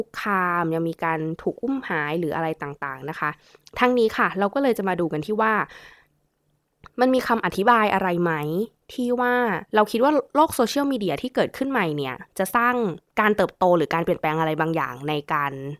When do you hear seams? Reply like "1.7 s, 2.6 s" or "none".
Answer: 9.7 s